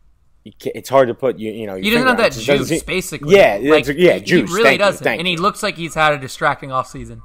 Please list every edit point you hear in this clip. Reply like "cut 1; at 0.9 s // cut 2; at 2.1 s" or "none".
none